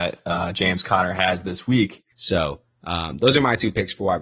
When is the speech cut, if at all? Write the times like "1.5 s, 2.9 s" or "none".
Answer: 2.1 s